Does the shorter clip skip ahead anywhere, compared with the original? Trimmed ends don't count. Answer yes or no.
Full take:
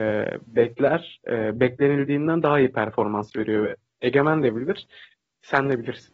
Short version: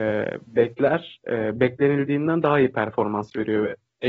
no